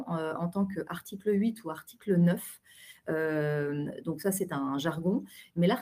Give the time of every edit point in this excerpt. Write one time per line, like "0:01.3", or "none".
none